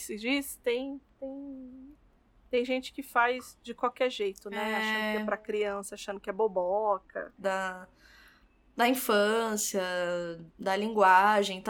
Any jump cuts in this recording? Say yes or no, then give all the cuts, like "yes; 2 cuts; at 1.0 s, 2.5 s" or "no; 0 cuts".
yes; 2 cuts; at 7.4 s, 10.5 s